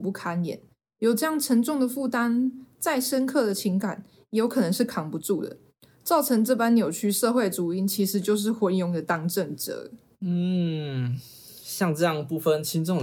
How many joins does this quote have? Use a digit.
0